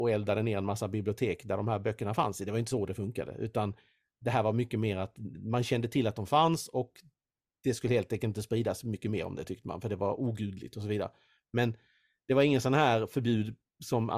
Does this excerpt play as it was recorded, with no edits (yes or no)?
yes